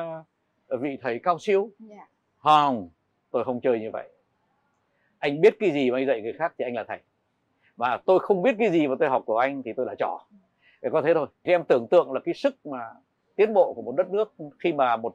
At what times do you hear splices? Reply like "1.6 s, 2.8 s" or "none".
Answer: none